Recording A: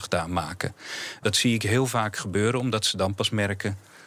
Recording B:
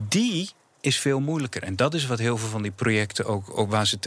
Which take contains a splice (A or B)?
A